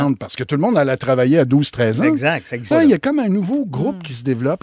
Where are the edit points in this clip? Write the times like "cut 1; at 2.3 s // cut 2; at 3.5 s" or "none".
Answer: cut 1; at 2.7 s

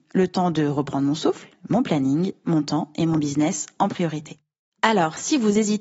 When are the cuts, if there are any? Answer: none

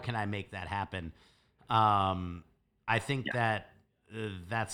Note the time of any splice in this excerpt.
none

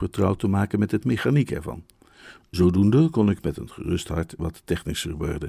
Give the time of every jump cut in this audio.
none

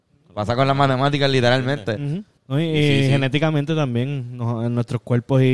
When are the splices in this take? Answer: cut 1; at 2.4 s

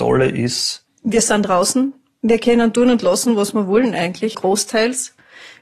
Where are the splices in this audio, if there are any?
cut 1; at 4.3 s

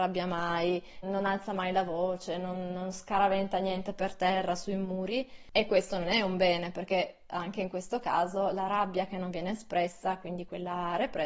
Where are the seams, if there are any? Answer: cut 1; at 1.0 s

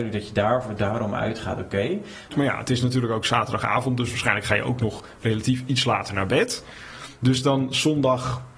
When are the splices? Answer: cut 1; at 2.3 s

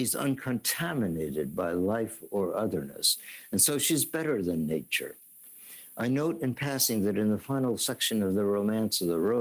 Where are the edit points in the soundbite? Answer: none

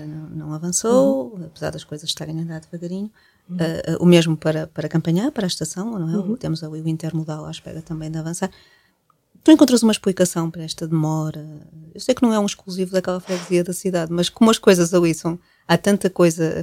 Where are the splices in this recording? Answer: none

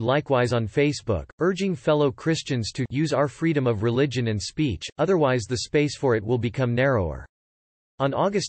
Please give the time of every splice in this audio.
none

